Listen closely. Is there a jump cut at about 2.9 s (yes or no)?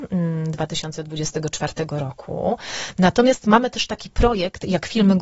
no